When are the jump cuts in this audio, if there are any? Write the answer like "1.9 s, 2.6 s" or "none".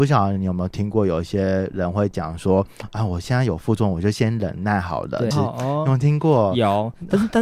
5.3 s